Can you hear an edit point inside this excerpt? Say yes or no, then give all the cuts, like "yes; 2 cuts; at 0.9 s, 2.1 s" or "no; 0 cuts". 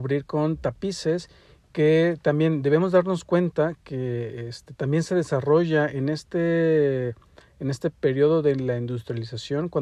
no; 0 cuts